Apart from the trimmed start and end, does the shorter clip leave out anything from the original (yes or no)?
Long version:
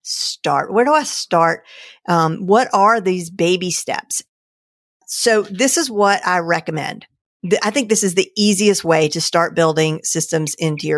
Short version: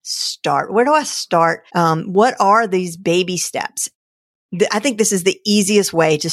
yes